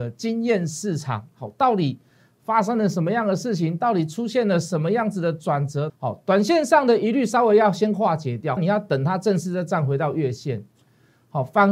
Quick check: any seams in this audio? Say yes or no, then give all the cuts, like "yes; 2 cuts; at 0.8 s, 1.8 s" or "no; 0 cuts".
yes; 2 cuts; at 5.9 s, 8.6 s